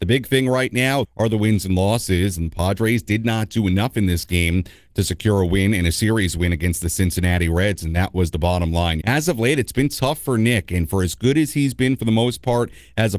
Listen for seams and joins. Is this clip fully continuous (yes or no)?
no